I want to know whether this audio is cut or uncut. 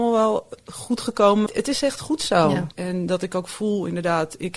cut